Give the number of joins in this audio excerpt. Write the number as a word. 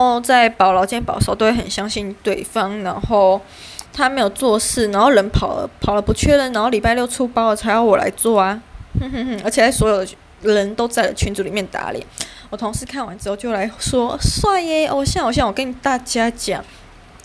one